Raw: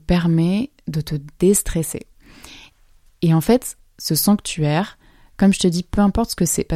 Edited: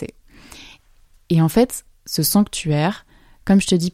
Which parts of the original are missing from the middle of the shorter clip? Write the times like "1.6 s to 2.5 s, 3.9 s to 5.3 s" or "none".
none